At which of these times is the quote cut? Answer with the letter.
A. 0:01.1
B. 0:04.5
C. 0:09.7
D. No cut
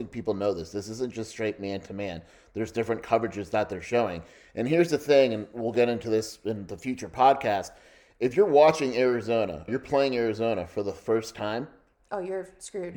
C